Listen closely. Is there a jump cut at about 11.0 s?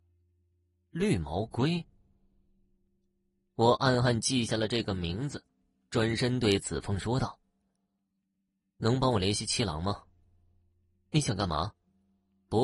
no; 0 cuts

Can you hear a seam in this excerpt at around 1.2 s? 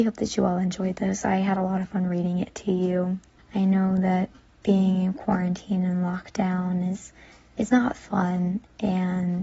no; 1 cut; at 3.4 s

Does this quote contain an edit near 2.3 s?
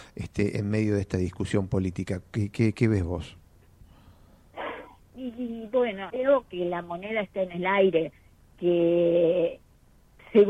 no; 1 cut; at 6.1 s

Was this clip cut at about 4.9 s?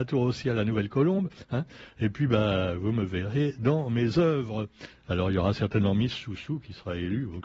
yes; 1 cut; at 4.9 s

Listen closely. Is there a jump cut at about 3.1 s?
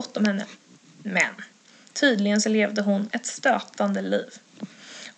yes; 1 cut; at 3.1 s

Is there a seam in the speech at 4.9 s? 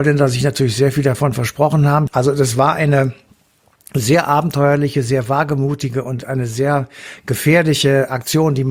no; 1 cut; at 2.1 s

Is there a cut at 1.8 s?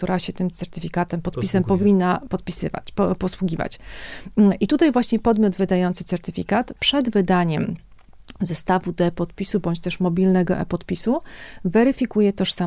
no; 0 cuts

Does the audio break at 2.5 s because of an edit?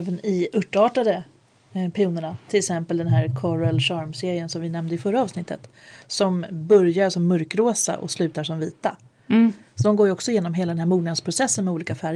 yes; 1 cut; at 2.5 s

